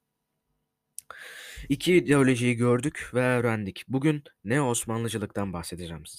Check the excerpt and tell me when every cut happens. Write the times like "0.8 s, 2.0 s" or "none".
none